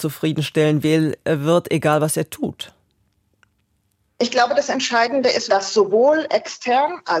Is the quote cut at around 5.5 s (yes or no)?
yes